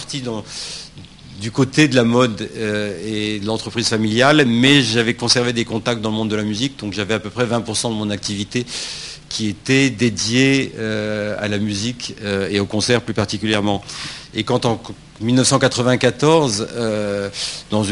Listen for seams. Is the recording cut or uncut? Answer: cut